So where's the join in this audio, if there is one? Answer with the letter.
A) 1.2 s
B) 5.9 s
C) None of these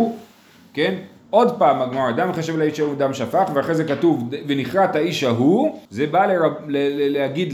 B